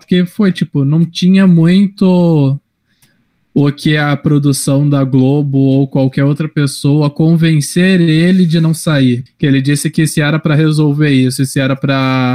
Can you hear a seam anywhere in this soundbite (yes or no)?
yes